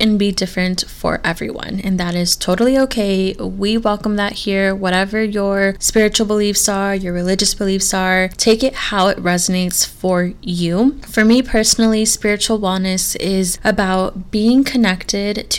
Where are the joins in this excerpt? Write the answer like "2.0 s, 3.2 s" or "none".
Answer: none